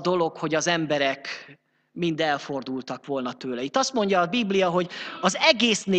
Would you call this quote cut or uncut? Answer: uncut